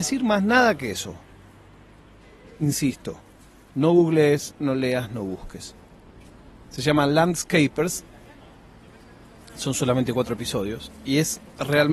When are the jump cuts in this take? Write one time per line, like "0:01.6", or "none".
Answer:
none